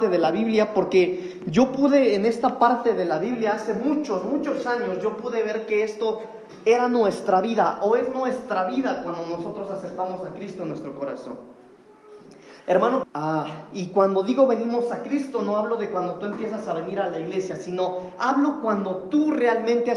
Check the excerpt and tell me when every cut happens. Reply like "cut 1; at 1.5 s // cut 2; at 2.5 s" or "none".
cut 1; at 13.0 s